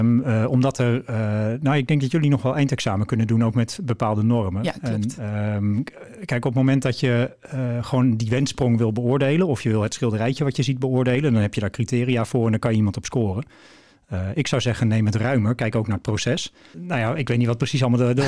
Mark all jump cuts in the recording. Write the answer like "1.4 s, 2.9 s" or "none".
16.7 s